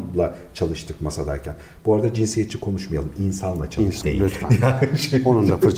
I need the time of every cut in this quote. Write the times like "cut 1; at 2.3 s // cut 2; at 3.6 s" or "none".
cut 1; at 4.0 s